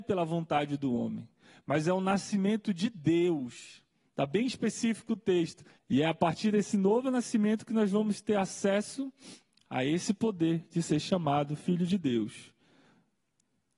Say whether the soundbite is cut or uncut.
cut